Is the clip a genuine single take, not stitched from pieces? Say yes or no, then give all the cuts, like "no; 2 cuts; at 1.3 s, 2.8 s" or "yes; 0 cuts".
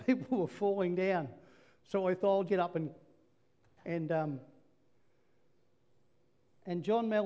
no; 1 cut; at 2.5 s